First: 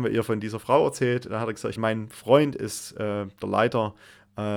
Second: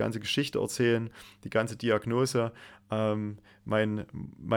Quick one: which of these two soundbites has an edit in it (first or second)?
first